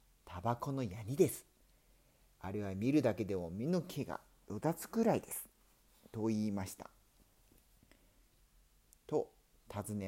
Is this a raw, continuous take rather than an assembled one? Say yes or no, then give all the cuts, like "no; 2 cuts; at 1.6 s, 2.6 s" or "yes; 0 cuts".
no; 1 cut; at 8.4 s